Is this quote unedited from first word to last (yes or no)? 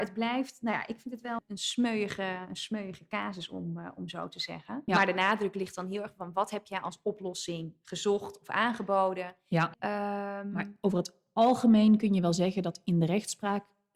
no